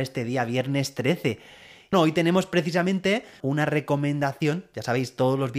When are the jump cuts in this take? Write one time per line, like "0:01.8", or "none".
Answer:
0:01.9
0:03.4